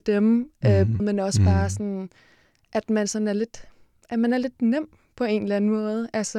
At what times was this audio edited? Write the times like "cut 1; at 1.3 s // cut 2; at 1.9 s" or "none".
cut 1; at 1.0 s